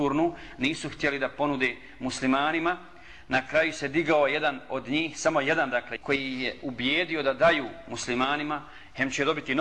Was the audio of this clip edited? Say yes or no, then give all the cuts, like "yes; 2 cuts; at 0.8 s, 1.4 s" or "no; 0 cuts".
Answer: yes; 1 cut; at 6.0 s